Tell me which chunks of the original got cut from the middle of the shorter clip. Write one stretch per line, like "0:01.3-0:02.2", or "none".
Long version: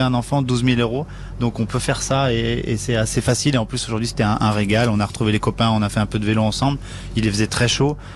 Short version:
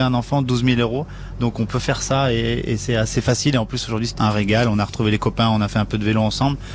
0:04.2-0:04.4